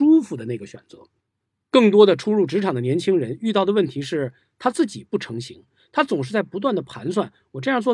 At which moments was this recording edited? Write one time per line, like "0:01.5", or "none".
none